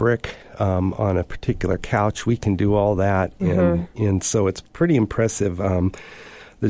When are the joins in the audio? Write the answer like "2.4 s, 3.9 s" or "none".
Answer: none